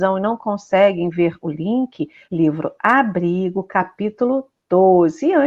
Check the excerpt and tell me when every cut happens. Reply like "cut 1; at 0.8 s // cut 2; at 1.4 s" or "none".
cut 1; at 2.2 s